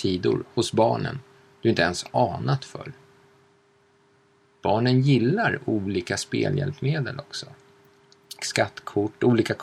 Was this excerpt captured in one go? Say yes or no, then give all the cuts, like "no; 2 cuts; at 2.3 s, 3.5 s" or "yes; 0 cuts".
no; 2 cuts; at 4.5 s, 8.4 s